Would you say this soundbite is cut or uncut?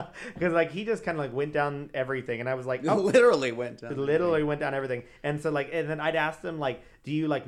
uncut